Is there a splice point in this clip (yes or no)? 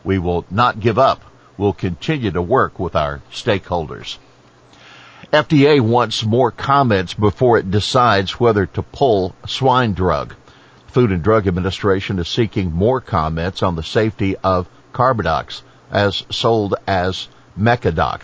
no